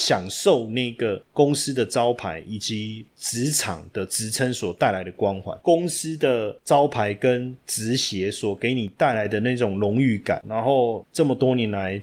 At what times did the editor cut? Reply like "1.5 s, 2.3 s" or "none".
5.6 s, 10.4 s